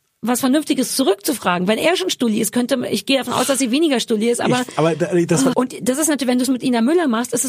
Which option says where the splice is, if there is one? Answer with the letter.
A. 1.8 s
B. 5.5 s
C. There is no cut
B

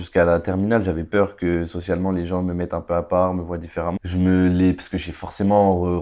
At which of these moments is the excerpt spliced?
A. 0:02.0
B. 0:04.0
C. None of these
B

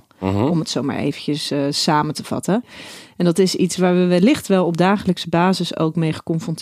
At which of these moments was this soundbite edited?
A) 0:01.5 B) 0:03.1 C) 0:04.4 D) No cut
D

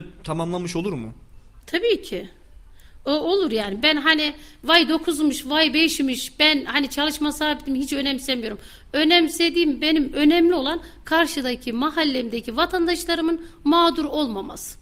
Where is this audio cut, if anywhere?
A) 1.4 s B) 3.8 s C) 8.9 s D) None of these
B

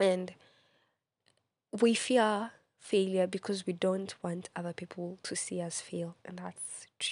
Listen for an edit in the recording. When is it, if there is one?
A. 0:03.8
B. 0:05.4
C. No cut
C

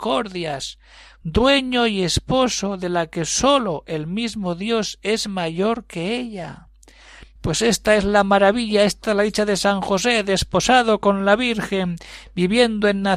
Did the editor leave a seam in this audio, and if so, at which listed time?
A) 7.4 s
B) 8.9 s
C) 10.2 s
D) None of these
A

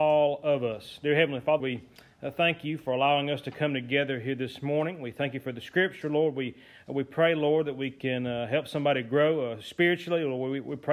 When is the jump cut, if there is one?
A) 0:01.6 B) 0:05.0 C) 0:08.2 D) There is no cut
A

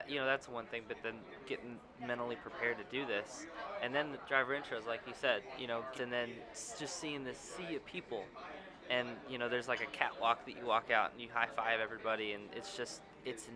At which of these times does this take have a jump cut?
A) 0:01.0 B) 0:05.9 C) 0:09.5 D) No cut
B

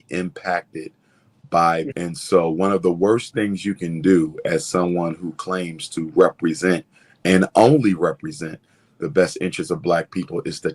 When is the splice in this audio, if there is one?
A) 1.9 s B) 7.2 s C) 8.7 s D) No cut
A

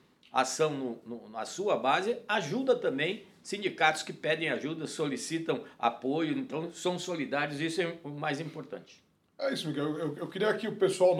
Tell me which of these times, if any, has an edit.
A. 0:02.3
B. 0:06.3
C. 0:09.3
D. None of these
D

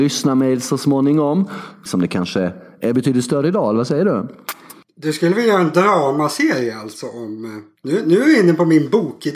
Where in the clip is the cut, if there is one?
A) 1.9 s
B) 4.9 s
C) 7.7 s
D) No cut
A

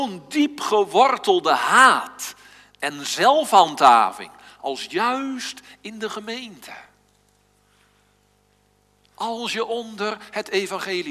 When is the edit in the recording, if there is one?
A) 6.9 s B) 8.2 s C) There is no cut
C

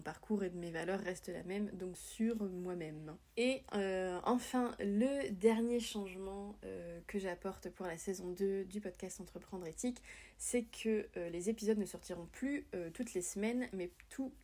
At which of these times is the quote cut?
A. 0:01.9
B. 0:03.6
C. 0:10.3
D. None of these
A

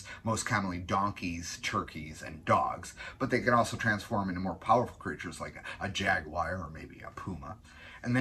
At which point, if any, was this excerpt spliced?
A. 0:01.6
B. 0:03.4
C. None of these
C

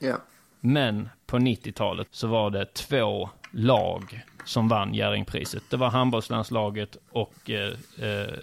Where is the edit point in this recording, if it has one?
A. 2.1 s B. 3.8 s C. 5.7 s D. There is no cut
A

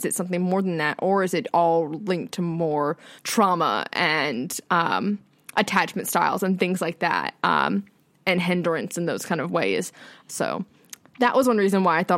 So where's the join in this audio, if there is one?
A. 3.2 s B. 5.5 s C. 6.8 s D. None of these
A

